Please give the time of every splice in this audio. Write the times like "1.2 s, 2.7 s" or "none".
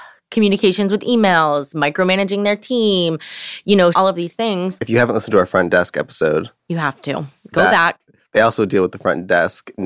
3.9 s